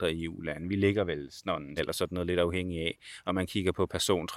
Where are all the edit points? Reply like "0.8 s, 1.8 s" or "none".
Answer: 1.8 s